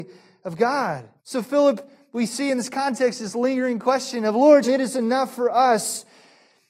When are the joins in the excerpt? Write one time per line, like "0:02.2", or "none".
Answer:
0:01.2
0:04.6